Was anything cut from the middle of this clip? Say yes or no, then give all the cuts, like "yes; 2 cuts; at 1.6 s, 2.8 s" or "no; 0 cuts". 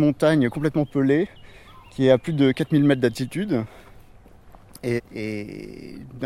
yes; 1 cut; at 5.0 s